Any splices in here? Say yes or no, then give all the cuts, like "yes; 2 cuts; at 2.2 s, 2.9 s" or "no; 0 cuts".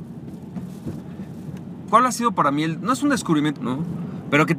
yes; 2 cuts; at 1.9 s, 3.6 s